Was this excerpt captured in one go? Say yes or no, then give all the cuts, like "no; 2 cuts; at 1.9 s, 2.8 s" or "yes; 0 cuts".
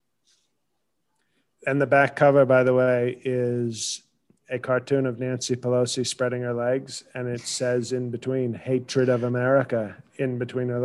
yes; 0 cuts